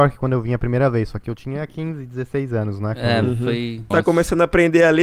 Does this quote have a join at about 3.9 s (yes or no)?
yes